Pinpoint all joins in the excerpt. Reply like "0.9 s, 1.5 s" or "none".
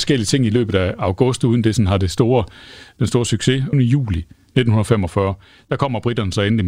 3.7 s